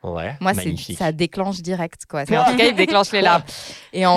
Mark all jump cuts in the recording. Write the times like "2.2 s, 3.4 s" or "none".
2.3 s